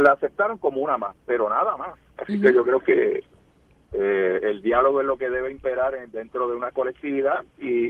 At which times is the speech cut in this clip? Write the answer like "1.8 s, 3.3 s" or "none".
2.2 s